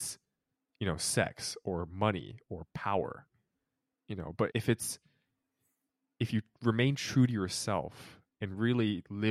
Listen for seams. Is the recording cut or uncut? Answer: cut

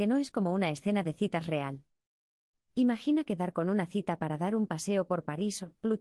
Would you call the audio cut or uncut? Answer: cut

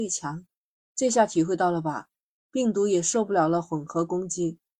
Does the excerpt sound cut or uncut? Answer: uncut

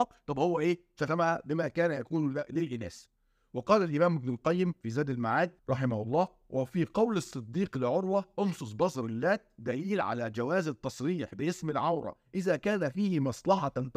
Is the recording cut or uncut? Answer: cut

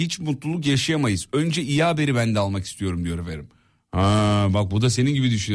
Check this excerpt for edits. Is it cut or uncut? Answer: uncut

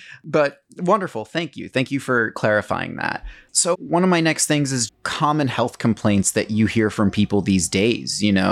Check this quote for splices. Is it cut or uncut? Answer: cut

